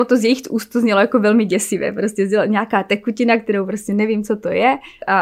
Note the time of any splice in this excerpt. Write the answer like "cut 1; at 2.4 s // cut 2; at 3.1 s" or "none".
none